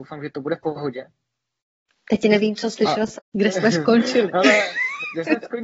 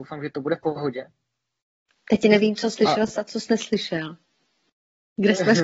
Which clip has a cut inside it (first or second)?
first